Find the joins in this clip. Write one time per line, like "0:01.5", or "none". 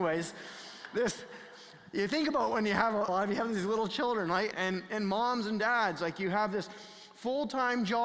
0:03.1
0:04.5